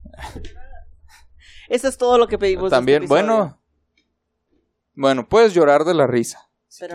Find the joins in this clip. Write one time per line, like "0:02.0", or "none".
none